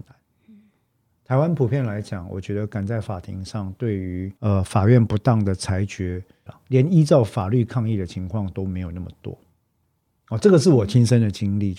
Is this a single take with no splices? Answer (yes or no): no